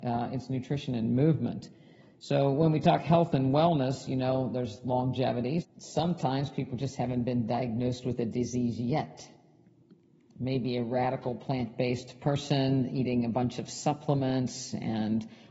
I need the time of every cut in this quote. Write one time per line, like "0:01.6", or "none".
0:05.6